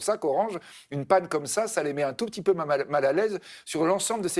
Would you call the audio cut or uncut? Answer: uncut